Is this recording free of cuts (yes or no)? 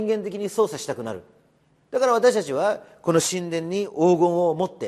yes